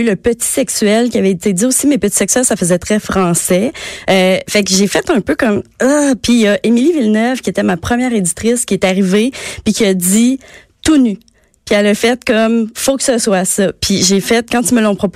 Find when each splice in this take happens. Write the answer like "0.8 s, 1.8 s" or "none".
none